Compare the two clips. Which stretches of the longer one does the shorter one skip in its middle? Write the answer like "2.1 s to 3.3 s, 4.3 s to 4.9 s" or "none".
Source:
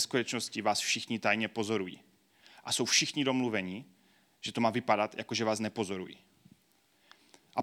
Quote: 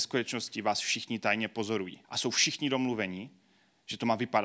2.0 s to 2.6 s

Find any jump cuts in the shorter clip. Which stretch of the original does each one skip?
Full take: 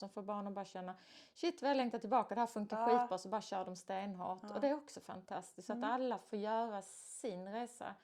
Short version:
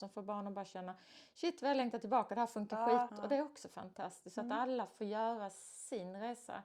3.1 s to 4.4 s

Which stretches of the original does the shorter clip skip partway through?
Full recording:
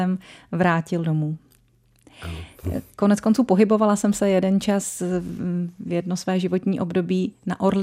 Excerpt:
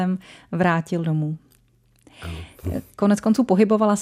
none

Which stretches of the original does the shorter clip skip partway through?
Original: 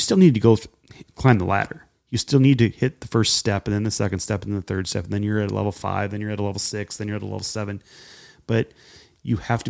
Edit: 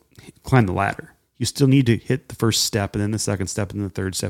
none

